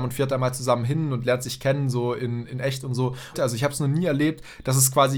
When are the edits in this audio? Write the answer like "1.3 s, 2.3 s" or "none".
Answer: 3.3 s